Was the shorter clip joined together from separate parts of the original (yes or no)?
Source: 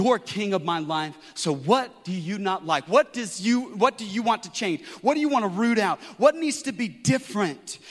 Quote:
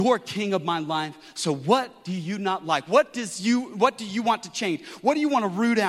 no